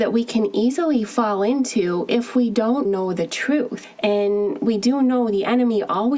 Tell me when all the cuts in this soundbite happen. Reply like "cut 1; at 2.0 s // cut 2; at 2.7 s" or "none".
cut 1; at 2.8 s